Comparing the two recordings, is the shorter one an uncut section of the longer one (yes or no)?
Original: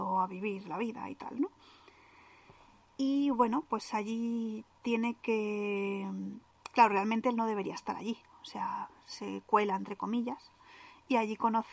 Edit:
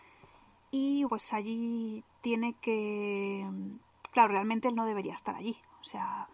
no